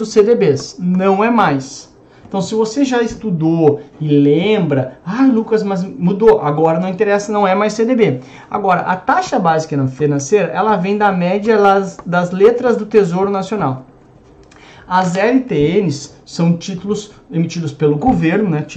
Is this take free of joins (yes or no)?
yes